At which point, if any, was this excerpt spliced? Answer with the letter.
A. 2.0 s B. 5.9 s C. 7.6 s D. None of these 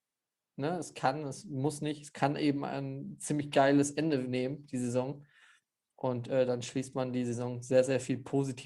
D